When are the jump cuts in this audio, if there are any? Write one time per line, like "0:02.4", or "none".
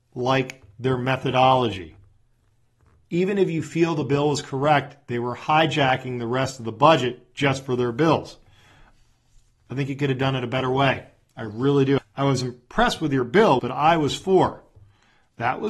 0:12.0
0:13.6